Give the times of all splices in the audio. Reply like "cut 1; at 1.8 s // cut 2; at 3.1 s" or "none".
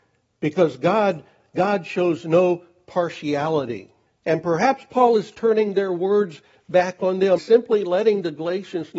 cut 1; at 4.1 s // cut 2; at 7.4 s